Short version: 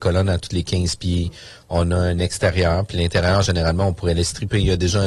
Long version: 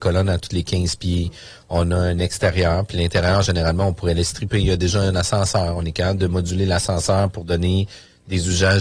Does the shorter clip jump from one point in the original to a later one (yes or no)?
no